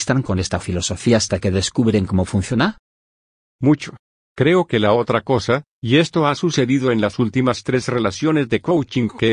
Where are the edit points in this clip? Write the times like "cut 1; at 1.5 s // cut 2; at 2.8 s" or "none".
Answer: none